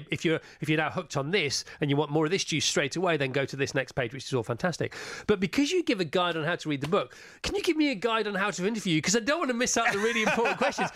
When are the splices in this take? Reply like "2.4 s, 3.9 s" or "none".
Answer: none